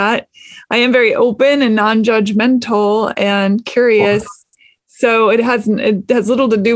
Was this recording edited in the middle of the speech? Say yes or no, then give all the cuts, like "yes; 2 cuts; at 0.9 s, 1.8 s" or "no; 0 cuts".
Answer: no; 0 cuts